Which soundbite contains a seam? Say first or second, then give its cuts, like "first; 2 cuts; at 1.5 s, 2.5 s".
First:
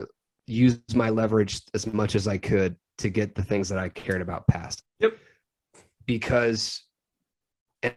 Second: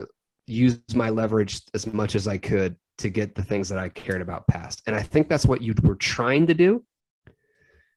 first; 1 cut; at 4.8 s